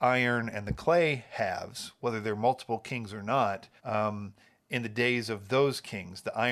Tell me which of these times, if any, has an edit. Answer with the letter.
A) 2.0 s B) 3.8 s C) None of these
B